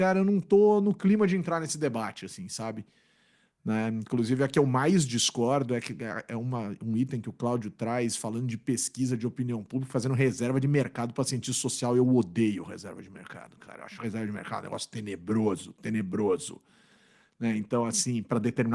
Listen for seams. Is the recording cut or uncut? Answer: uncut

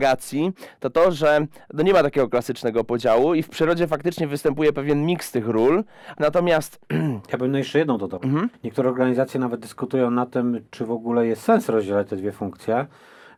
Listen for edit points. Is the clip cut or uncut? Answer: cut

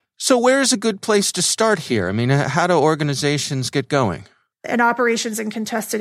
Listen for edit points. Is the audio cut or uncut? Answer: cut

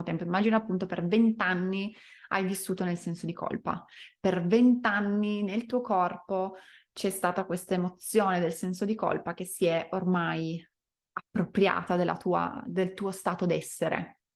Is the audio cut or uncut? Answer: uncut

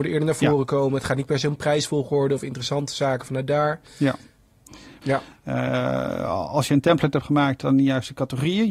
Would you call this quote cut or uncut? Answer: cut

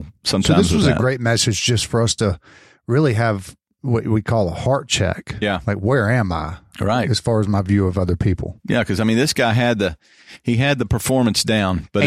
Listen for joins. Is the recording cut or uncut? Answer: uncut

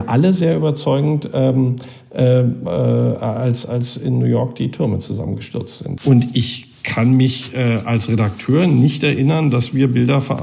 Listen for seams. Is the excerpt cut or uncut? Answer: cut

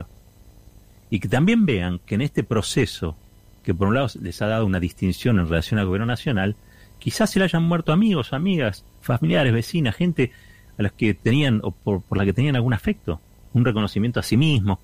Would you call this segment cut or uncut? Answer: cut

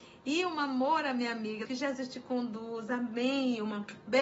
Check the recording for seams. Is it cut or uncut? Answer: cut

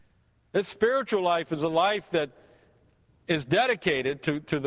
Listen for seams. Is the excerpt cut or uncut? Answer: uncut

